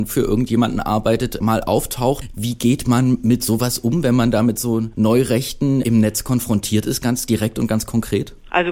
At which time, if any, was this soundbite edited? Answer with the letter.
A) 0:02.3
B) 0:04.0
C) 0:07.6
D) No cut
A